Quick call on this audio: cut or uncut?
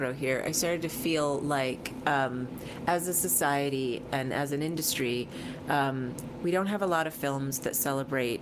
uncut